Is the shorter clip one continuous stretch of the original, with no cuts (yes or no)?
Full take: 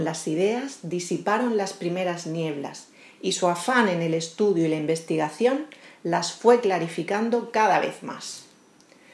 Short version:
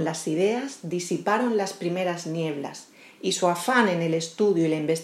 yes